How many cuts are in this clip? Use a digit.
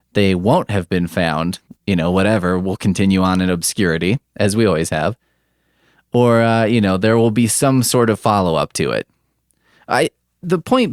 1